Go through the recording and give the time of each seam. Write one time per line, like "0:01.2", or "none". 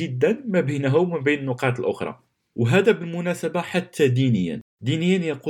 none